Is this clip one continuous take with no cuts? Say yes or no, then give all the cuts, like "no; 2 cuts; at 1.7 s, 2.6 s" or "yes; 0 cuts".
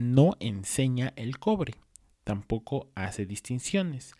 yes; 0 cuts